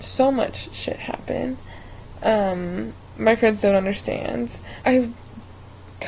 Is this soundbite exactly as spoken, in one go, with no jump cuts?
no; 1 cut; at 4.8 s

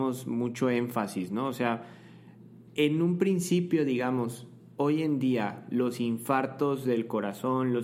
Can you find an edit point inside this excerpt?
yes; 1 cut; at 2.7 s

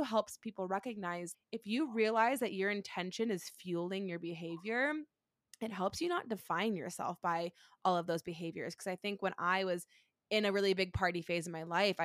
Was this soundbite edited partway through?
yes; 1 cut; at 1.3 s

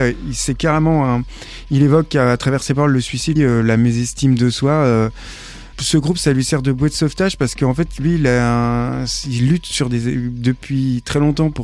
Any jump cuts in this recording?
yes; 2 cuts; at 3.4 s, 5.7 s

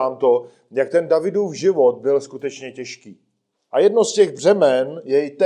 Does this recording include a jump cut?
yes; 1 cut; at 3.5 s

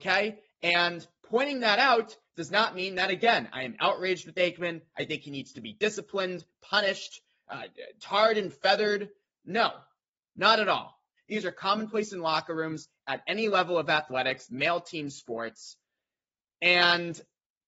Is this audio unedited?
no; 2 cuts; at 11.2 s, 14.5 s

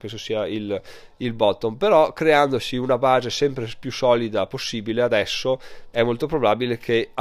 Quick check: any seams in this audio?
yes; 1 cut; at 5.9 s

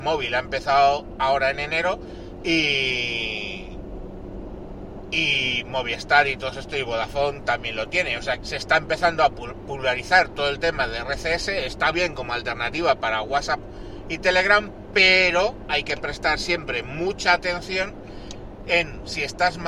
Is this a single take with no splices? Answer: no; 2 cuts; at 8.4 s, 11.9 s

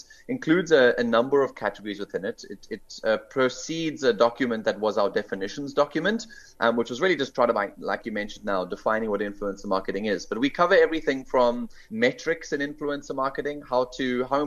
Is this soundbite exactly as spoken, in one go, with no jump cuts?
yes; 0 cuts

